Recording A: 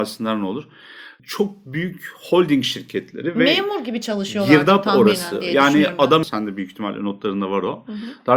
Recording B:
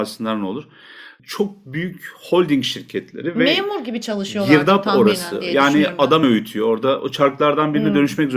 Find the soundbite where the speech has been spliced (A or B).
A